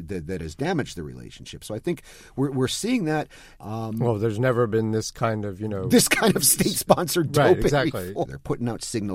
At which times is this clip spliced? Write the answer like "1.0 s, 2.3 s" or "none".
3.6 s, 8.3 s